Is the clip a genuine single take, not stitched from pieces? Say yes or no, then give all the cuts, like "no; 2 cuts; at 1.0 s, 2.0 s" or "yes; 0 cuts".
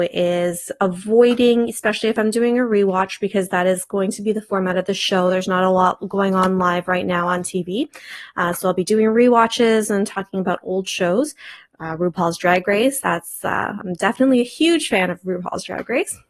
yes; 0 cuts